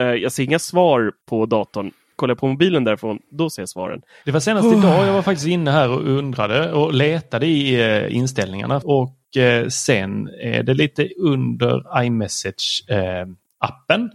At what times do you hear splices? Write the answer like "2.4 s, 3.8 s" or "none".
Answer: 4.2 s, 8.8 s